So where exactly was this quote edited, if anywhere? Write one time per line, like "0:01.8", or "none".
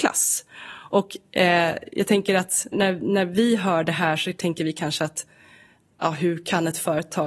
0:02.7